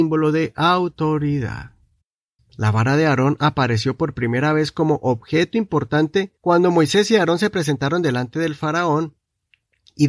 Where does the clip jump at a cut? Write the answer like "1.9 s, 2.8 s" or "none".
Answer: 2.4 s, 6.4 s